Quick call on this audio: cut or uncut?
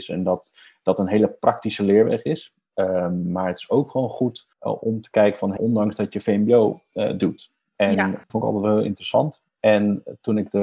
cut